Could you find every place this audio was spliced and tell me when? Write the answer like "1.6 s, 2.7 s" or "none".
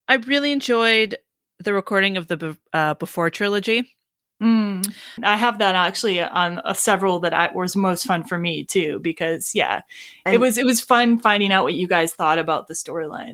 5.2 s